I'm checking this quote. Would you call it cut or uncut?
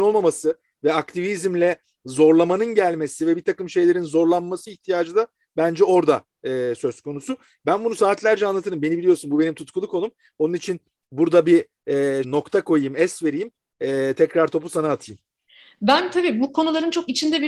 cut